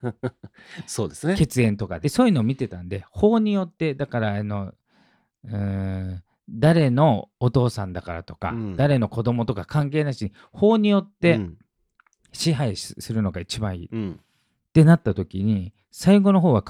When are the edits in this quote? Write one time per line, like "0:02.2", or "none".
0:02.0